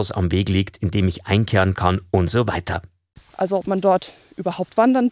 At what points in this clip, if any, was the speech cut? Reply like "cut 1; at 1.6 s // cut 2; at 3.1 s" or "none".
cut 1; at 3.2 s